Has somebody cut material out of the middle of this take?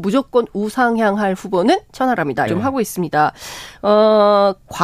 yes; 1 cut; at 2.5 s

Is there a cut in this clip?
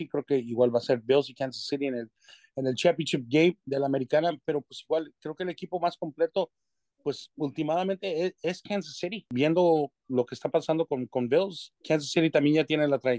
no; 0 cuts

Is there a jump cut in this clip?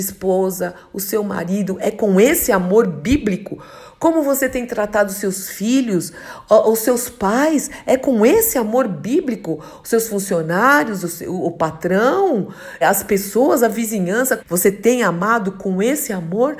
yes; 2 cuts; at 12.8 s, 14.4 s

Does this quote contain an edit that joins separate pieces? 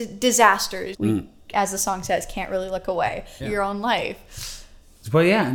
yes; 2 cuts; at 0.9 s, 3.4 s

